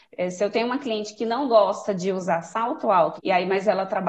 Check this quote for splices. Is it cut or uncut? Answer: cut